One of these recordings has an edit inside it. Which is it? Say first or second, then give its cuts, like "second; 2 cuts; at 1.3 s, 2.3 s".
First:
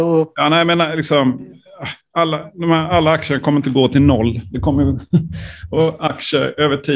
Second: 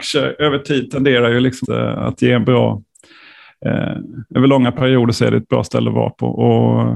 second; 1 cut; at 1.6 s